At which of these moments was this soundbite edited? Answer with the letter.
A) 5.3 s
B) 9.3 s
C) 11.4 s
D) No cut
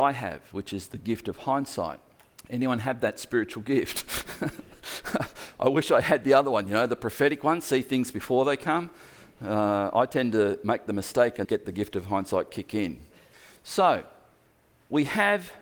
C